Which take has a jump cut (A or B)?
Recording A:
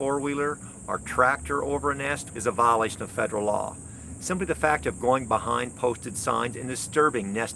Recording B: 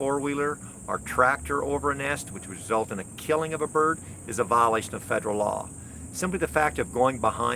A